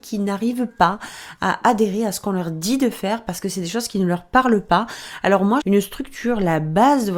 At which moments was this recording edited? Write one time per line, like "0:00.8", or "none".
0:05.6